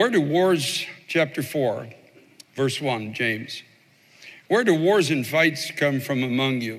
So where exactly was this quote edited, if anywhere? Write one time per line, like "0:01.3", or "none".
none